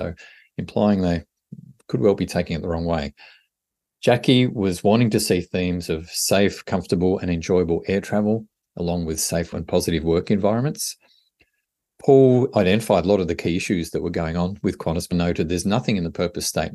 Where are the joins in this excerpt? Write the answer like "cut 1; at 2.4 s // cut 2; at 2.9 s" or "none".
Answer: cut 1; at 9.5 s // cut 2; at 15.1 s